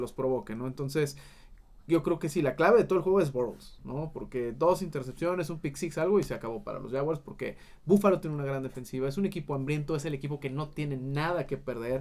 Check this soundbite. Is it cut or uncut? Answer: uncut